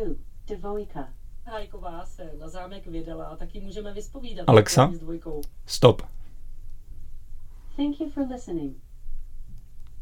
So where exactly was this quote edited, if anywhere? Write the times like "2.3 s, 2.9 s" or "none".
none